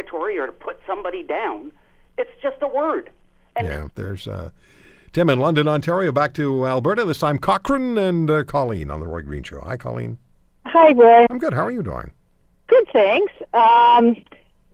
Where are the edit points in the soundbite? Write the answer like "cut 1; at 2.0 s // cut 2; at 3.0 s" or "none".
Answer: cut 1; at 3.9 s // cut 2; at 11.3 s